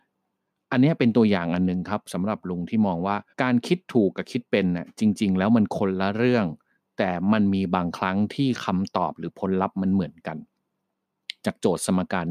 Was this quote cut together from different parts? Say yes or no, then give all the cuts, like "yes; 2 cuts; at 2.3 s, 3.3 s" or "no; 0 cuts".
yes; 1 cut; at 3.3 s